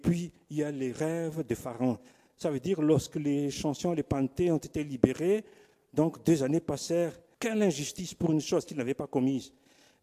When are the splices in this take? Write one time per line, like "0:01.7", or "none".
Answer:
0:07.3